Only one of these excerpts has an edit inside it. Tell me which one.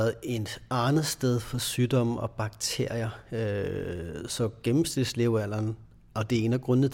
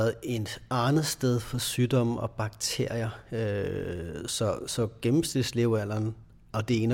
first; 1 cut; at 4.3 s

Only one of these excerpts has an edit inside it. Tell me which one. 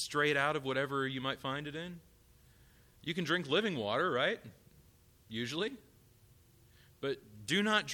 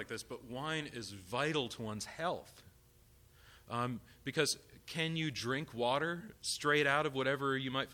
second; 1 cut; at 6.4 s

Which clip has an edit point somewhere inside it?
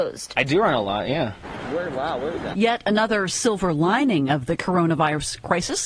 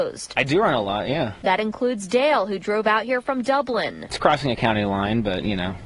first; 2 cuts; at 1.4 s, 2.5 s

